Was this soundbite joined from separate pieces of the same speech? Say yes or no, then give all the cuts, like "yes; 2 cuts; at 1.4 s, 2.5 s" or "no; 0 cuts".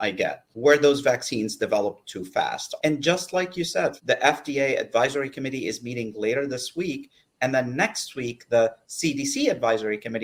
yes; 2 cuts; at 2.8 s, 4.0 s